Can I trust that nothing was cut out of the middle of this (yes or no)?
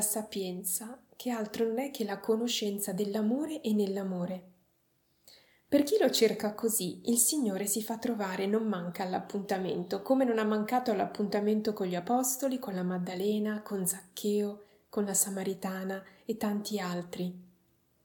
yes